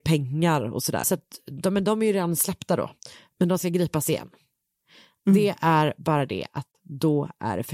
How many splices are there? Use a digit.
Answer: 1